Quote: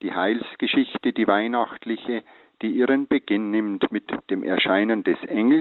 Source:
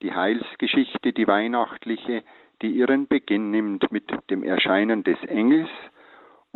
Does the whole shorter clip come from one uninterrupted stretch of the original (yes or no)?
yes